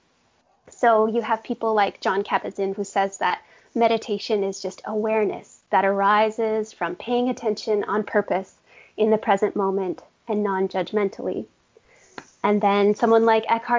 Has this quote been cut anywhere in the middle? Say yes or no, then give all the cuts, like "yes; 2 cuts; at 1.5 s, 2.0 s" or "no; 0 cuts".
yes; 1 cut; at 2.8 s